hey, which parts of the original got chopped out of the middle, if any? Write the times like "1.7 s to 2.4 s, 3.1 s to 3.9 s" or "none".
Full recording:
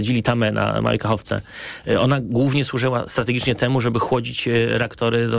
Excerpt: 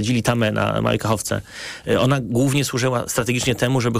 none